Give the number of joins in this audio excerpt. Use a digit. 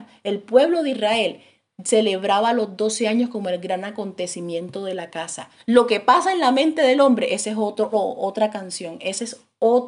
2